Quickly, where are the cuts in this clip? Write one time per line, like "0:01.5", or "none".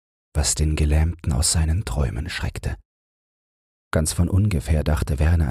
0:03.7